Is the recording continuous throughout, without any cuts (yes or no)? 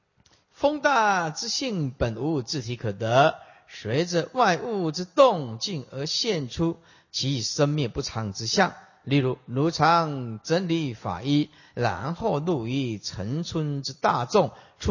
yes